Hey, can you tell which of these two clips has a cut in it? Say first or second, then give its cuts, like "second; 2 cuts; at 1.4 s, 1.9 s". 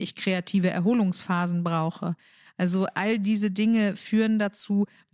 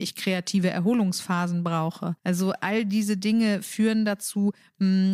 second; 1 cut; at 2.2 s